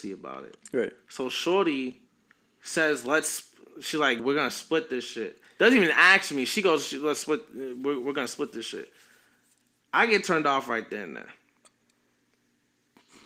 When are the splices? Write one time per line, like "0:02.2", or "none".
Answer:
0:04.2